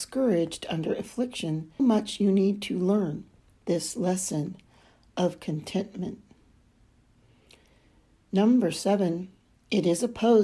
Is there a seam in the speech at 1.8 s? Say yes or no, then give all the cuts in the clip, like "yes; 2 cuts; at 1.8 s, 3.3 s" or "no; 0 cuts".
yes; 1 cut; at 1.8 s